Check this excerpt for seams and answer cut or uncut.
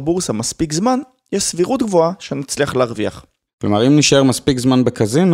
cut